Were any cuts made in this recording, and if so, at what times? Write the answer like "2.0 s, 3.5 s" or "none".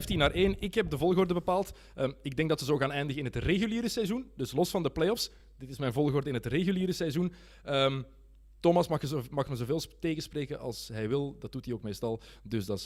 none